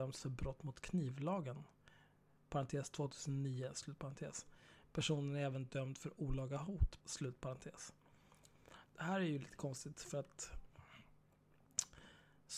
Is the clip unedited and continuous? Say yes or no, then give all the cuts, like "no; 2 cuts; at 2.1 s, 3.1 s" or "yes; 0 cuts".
no; 1 cut; at 7.0 s